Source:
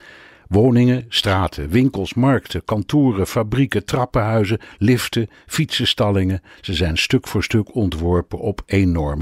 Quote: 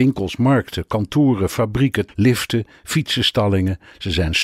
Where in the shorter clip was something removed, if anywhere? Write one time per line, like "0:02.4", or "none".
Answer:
0:02.1